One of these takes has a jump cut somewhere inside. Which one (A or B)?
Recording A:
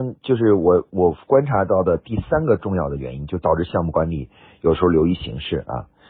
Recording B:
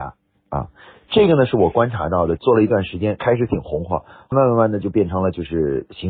B